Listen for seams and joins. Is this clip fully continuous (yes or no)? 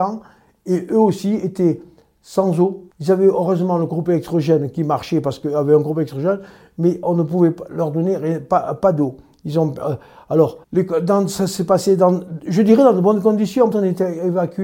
no